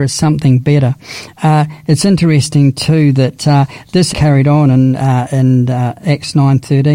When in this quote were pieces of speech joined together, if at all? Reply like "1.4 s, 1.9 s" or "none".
4.1 s